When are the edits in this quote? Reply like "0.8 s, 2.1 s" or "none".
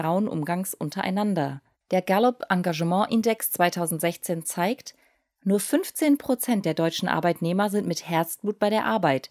1.7 s